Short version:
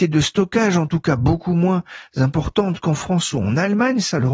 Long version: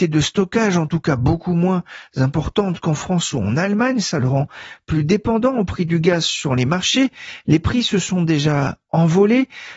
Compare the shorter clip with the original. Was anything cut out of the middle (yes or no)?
no